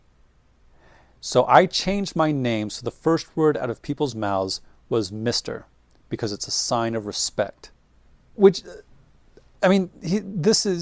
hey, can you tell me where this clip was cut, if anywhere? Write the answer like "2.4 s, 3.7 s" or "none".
none